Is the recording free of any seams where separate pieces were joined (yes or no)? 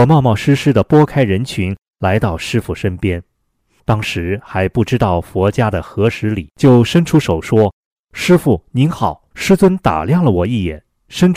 no